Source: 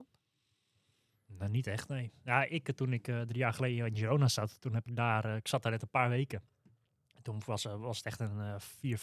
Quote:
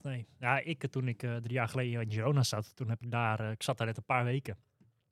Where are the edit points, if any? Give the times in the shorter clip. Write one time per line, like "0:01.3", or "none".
none